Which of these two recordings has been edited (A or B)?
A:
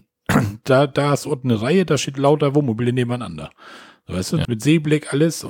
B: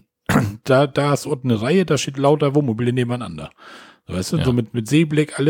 A